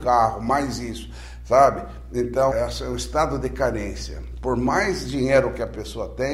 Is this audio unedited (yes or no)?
no